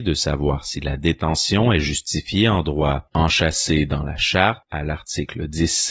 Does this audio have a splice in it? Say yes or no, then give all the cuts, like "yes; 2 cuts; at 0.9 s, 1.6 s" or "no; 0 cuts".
yes; 1 cut; at 3.1 s